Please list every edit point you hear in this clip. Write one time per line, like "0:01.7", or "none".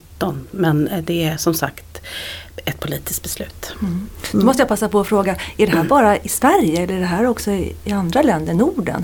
none